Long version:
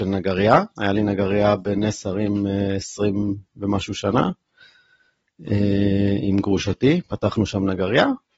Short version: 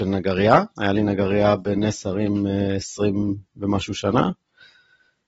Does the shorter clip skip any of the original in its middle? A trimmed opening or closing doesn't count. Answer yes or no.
no